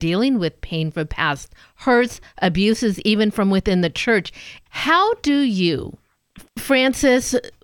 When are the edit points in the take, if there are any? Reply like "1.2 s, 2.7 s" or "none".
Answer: 4.7 s, 6.5 s